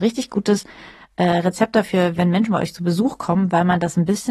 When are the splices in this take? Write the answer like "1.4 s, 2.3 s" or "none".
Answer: none